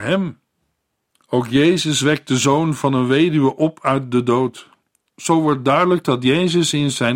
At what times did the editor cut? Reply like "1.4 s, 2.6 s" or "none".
1.1 s